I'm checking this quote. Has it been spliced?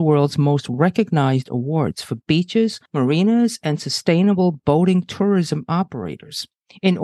no; 0 cuts

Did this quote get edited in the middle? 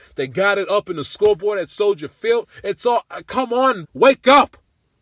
yes; 1 cut; at 3.8 s

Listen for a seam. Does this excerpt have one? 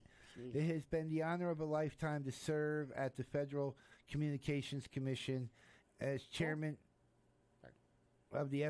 yes; 1 cut; at 5.8 s

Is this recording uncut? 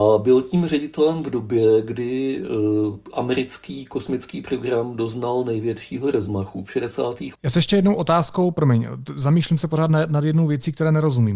no; 1 cut; at 7.3 s

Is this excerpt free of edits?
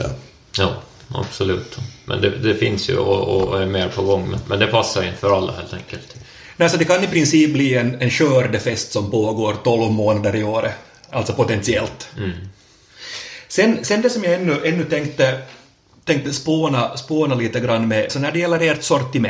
no; 1 cut; at 18.1 s

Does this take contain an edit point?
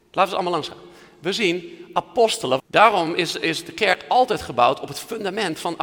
yes; 1 cut; at 2.6 s

